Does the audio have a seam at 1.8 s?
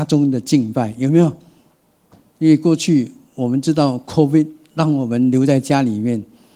no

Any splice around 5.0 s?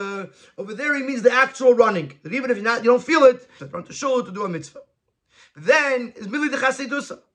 no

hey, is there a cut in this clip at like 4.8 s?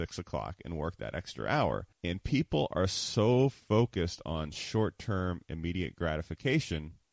no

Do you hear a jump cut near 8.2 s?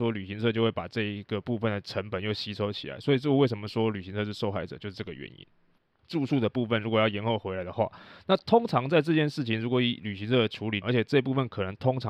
no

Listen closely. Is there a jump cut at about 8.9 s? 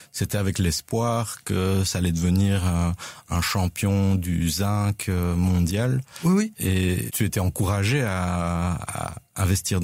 no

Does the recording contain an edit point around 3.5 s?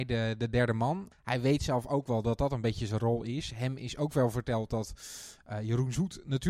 no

